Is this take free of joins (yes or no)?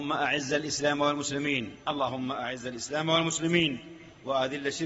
no